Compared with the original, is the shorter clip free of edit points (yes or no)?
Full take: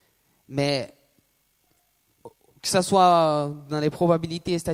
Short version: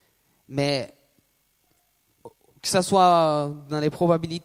yes